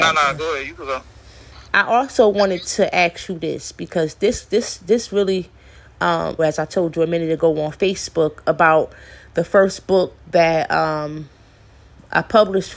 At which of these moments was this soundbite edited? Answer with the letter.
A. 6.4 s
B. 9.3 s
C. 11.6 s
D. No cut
A